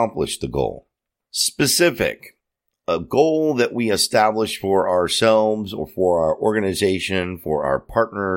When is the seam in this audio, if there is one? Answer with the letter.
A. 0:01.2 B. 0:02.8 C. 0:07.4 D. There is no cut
A